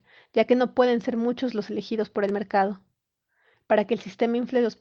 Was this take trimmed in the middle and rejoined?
no; 0 cuts

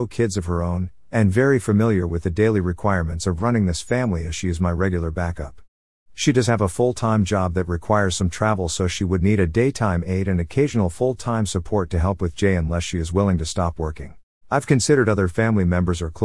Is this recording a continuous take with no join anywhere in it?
no; 1 cut; at 14.4 s

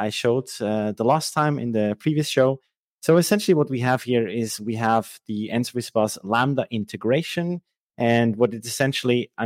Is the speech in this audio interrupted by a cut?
no; 0 cuts

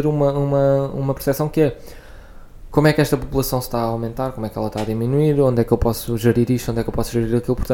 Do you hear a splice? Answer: no; 0 cuts

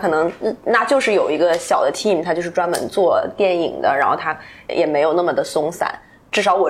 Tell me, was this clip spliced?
yes; 1 cut; at 4.7 s

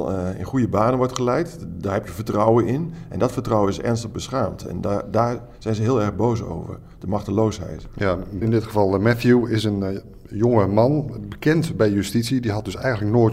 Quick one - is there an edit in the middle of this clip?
yes; 1 cut; at 8.4 s

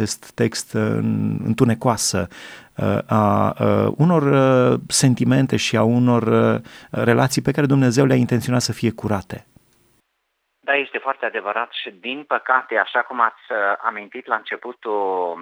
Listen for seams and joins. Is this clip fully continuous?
yes; 0 cuts

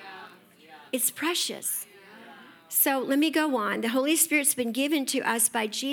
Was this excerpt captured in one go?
yes; 0 cuts

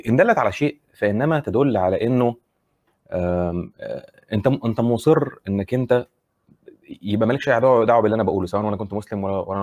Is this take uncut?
yes; 0 cuts

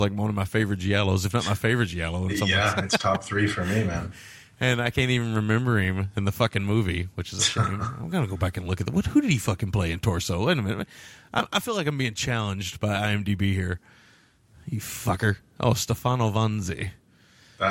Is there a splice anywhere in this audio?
no; 0 cuts

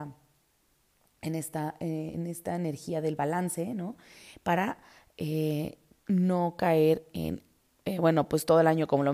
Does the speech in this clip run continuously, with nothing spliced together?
yes; 0 cuts

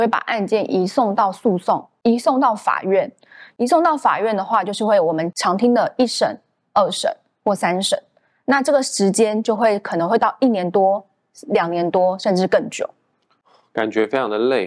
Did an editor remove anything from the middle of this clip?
no; 0 cuts

